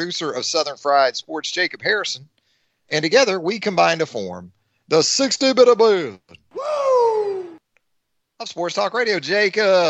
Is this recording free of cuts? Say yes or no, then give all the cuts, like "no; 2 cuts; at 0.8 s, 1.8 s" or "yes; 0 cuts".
yes; 0 cuts